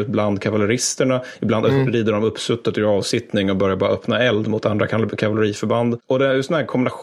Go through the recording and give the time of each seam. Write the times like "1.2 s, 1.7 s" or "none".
none